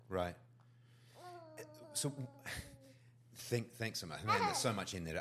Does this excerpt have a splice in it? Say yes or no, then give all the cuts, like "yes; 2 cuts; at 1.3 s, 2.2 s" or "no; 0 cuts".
no; 0 cuts